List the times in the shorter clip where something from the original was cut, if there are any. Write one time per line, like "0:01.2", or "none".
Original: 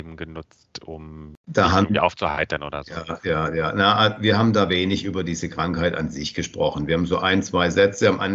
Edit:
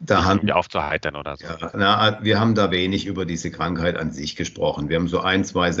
0:01.7